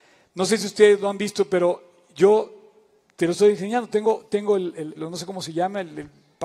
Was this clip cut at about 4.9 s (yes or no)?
yes